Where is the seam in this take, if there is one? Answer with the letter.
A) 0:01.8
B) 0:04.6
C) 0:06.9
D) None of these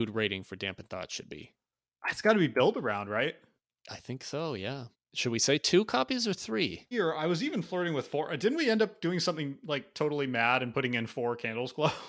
C